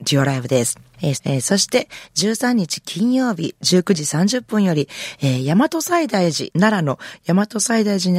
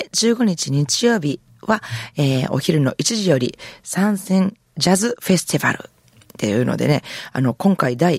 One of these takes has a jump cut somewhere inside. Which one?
first; 1 cut; at 1.1 s

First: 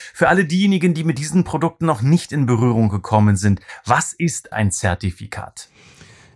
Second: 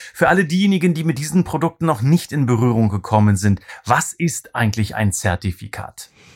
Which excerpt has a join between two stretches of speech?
first; 1 cut; at 4.5 s

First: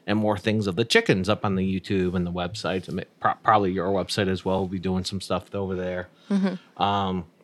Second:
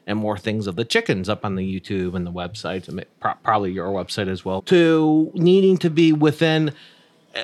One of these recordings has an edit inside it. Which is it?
second; 1 cut; at 4.6 s

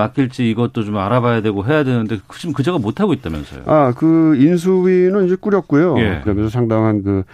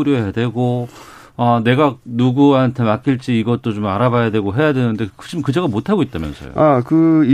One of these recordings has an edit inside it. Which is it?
first; 1 cut; at 6.2 s

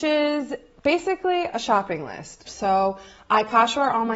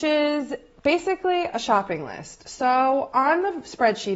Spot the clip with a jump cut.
first; 1 cut; at 2.4 s

